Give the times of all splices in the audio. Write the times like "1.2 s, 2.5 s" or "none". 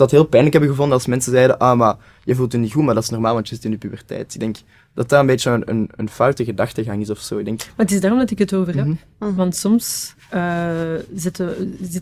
none